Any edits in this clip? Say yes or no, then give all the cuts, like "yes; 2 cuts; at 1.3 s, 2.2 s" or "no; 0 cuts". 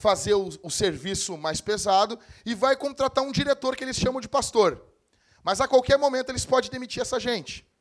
no; 0 cuts